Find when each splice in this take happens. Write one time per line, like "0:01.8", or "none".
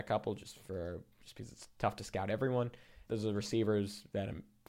0:03.1

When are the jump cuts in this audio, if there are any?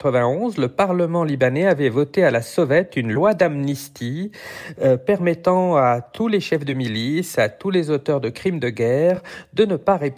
none

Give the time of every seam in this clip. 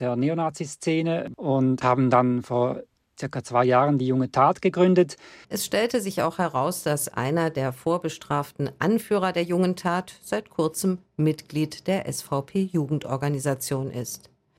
0:05.4

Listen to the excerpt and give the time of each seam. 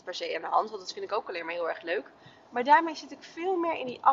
none

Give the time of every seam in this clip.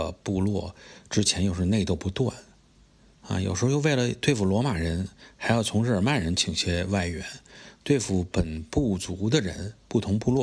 none

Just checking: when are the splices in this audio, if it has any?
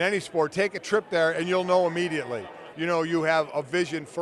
0:02.7

